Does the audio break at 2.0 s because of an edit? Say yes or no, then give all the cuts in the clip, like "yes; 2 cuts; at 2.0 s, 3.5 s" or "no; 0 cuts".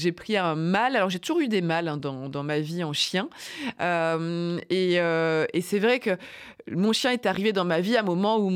yes; 1 cut; at 2.0 s